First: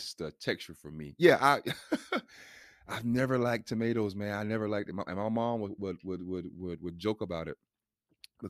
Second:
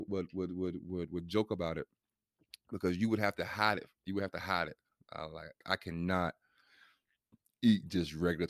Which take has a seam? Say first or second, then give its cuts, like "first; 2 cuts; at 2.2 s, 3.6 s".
second; 1 cut; at 5.6 s